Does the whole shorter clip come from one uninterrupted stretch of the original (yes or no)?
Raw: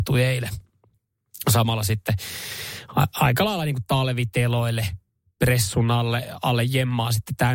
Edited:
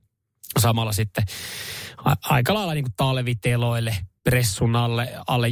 no